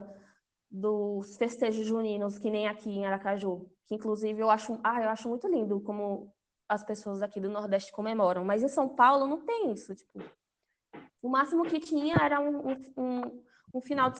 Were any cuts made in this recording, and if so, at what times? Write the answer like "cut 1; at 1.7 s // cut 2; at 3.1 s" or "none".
none